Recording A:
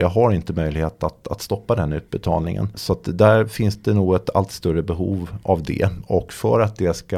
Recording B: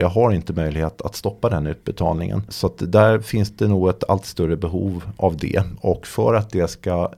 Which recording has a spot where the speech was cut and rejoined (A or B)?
B